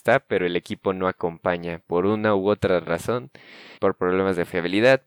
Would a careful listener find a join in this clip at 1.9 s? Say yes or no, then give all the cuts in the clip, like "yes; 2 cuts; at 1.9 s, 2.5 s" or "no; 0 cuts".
no; 1 cut; at 3.8 s